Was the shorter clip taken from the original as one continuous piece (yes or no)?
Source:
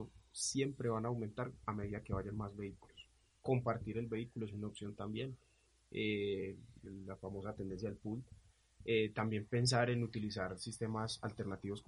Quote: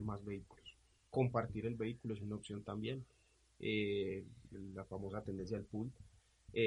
yes